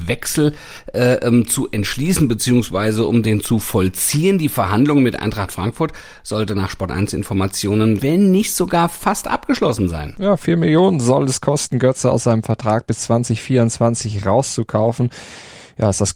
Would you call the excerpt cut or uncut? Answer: cut